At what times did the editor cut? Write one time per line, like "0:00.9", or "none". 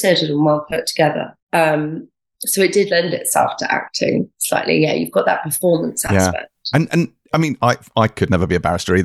0:01.4